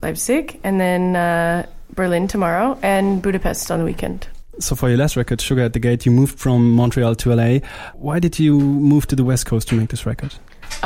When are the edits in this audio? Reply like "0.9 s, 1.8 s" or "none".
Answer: 4.5 s